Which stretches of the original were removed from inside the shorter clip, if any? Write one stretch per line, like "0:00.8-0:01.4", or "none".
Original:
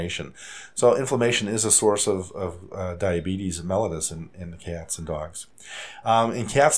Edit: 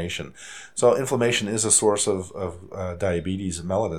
none